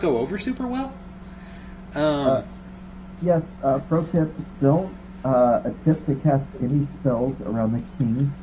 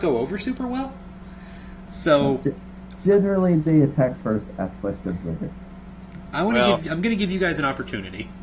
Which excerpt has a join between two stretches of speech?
second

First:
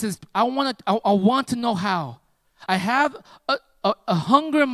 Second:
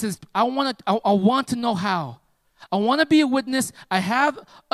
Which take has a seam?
first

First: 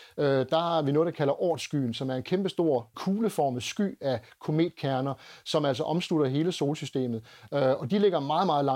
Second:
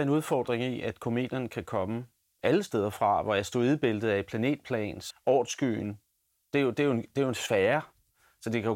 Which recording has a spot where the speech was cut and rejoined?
second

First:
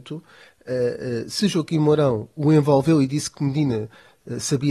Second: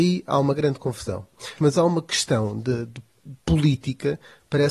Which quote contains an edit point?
second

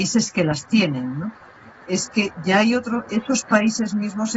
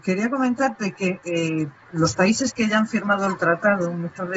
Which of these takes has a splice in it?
first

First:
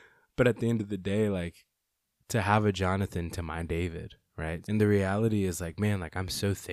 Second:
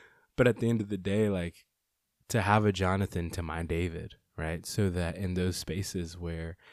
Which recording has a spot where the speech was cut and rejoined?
first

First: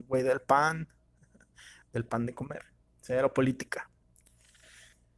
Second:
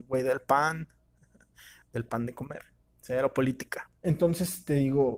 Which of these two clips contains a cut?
second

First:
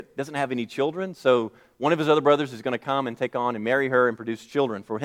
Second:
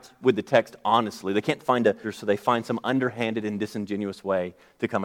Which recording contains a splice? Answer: second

